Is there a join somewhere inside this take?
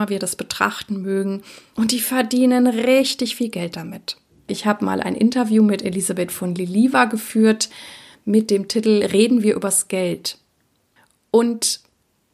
yes; 1 cut; at 4.5 s

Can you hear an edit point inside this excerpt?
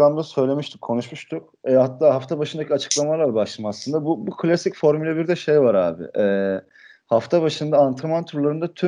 no; 0 cuts

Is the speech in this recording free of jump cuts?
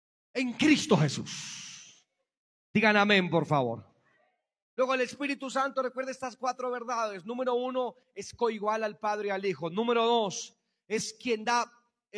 yes; 0 cuts

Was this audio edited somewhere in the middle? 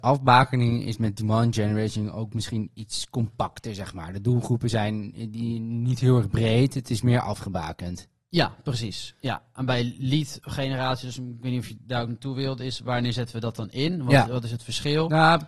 no; 0 cuts

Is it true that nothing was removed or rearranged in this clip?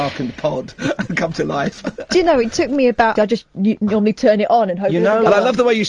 no; 1 cut; at 3.2 s

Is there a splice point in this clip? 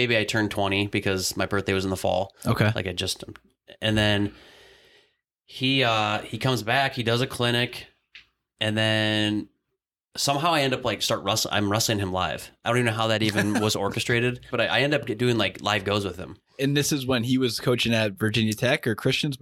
yes; 1 cut; at 14.5 s

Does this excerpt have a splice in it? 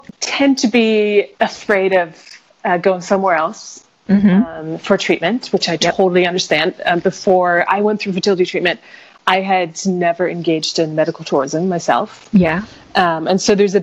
yes; 1 cut; at 1.3 s

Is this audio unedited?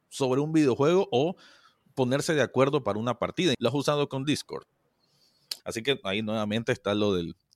no; 2 cuts; at 3.5 s, 5.6 s

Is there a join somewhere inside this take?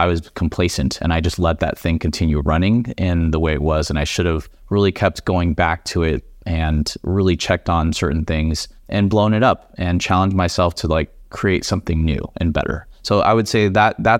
no; 0 cuts

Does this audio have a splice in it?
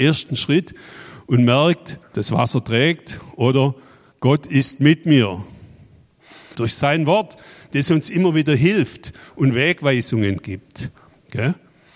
yes; 2 cuts; at 2.1 s, 6.6 s

